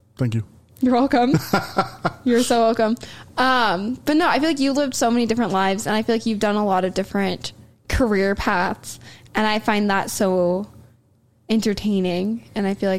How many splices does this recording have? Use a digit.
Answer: 0